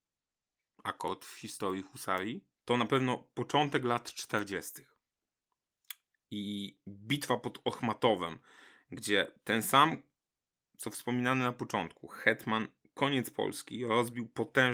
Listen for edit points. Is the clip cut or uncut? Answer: cut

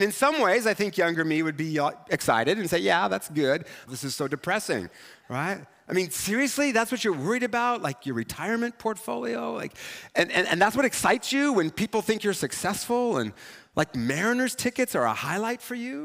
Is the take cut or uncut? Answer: cut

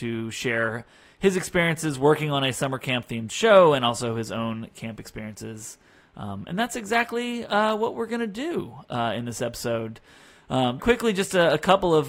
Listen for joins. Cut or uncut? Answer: cut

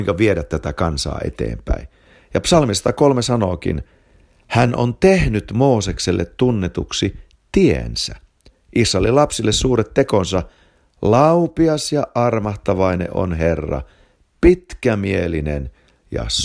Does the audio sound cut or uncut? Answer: uncut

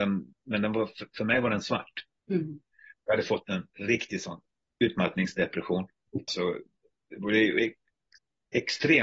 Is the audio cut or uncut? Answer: cut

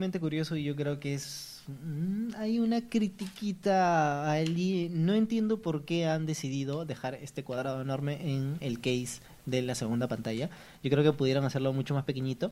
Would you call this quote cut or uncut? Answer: uncut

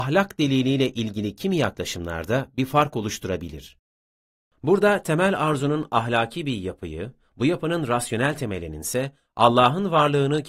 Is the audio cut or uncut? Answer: cut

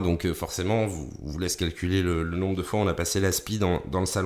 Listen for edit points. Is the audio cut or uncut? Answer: uncut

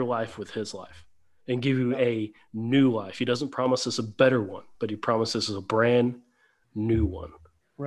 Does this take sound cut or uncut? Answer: uncut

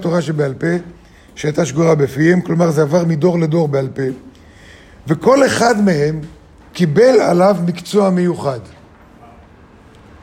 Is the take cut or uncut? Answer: cut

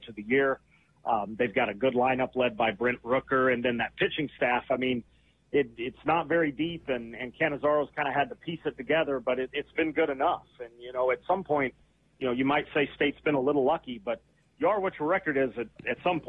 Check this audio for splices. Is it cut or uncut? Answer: uncut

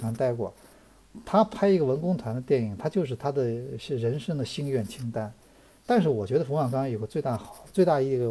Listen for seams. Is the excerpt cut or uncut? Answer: uncut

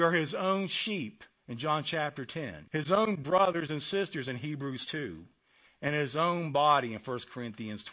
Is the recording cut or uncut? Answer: cut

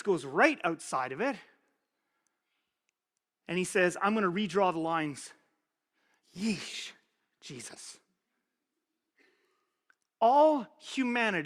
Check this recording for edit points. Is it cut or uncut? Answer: cut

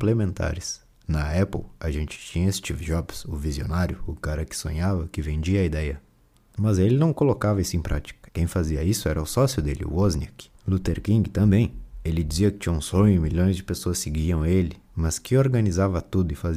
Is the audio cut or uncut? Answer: cut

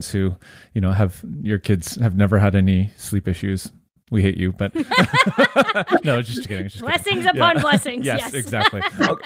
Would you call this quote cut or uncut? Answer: uncut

